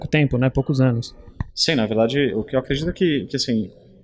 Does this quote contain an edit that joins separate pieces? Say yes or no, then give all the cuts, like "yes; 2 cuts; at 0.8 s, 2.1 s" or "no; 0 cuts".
no; 0 cuts